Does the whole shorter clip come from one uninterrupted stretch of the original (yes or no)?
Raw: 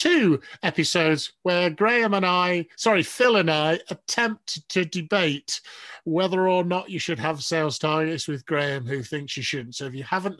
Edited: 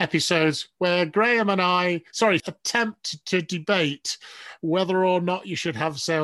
no